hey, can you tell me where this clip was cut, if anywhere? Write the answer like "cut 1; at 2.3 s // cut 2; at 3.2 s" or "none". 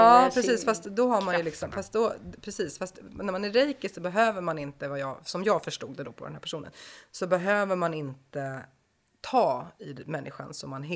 none